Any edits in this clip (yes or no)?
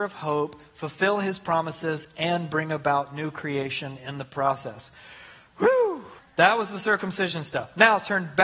yes